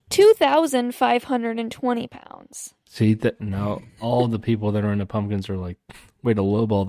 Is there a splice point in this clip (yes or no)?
yes